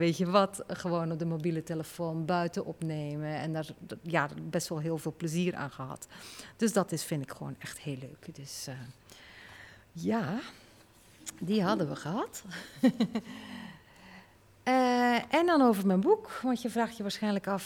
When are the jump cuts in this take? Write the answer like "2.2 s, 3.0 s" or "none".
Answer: none